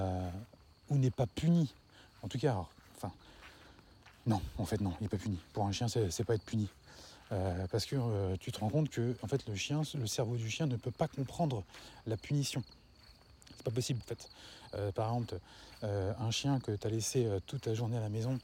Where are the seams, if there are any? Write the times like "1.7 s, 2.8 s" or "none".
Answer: 14.0 s